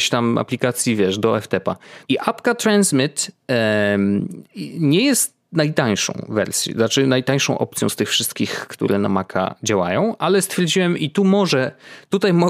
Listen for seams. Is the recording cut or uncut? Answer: cut